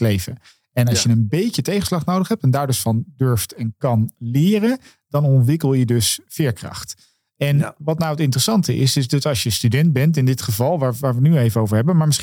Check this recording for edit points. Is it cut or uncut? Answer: uncut